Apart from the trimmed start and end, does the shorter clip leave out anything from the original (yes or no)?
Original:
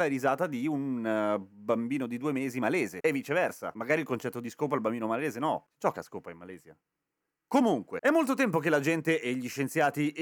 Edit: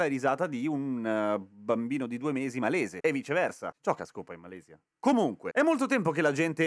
yes